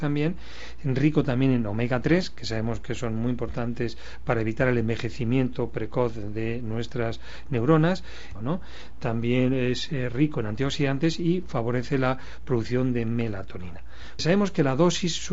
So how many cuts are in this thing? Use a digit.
2